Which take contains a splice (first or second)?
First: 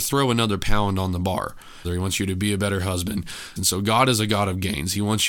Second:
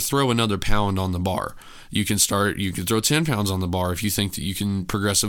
first